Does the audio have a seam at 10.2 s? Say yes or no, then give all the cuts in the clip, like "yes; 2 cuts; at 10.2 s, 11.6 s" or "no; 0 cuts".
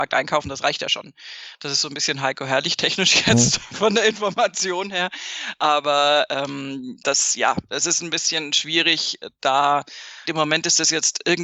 yes; 1 cut; at 10.2 s